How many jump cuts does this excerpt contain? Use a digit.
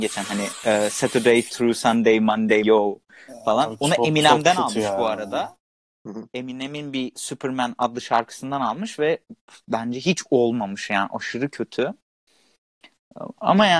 1